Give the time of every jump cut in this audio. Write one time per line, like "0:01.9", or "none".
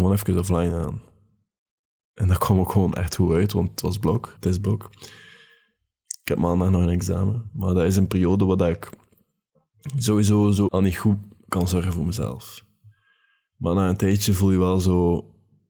0:04.4
0:10.7